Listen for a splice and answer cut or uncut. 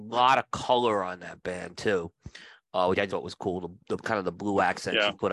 cut